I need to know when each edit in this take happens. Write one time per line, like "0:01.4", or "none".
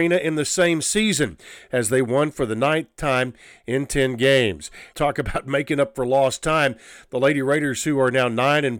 0:04.9